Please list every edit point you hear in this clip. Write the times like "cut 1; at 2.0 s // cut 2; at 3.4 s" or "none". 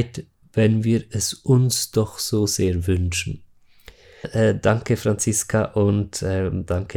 cut 1; at 4.2 s